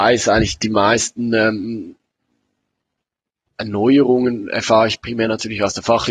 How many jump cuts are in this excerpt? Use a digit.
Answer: 0